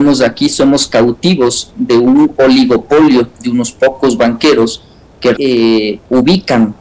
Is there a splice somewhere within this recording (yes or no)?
yes